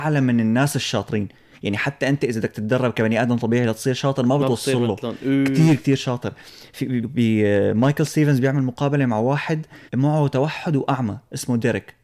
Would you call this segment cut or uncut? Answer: cut